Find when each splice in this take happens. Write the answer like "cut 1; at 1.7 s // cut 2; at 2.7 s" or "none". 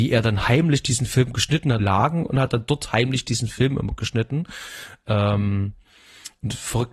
cut 1; at 1.8 s